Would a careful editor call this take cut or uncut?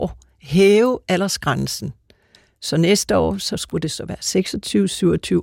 uncut